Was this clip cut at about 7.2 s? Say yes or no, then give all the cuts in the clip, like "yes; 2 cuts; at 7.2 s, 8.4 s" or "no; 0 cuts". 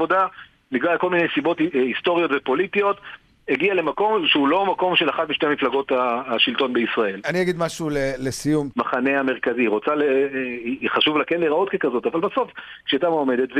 yes; 2 cuts; at 7.2 s, 8.7 s